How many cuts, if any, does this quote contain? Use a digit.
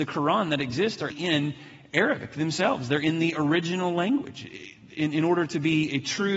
1